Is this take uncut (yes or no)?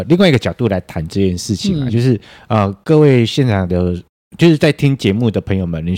yes